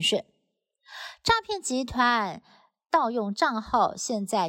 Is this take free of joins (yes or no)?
yes